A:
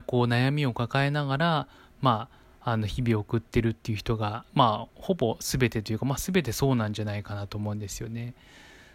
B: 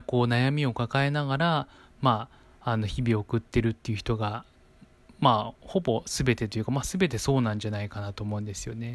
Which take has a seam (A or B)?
A